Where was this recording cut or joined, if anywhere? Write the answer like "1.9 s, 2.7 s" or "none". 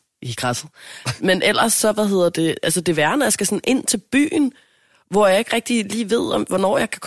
1.2 s